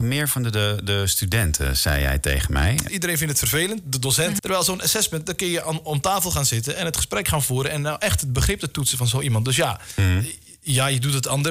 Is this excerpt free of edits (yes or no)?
no